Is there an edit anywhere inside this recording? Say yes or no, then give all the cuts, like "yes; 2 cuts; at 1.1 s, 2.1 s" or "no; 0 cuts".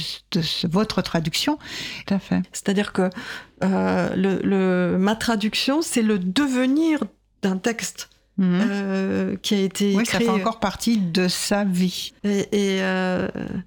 yes; 2 cuts; at 2.1 s, 12.1 s